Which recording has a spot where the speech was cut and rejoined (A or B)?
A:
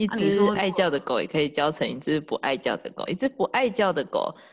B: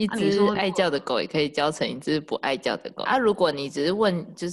B